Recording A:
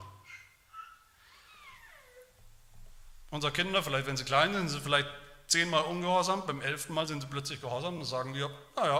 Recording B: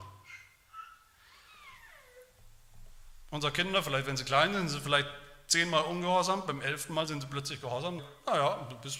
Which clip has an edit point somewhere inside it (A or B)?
B